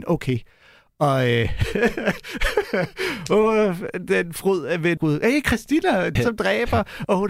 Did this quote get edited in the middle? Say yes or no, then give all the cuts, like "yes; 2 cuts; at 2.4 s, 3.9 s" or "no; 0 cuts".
yes; 2 cuts; at 5.0 s, 6.2 s